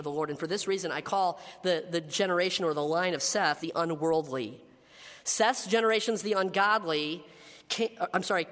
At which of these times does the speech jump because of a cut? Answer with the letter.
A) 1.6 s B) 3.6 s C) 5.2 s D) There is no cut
B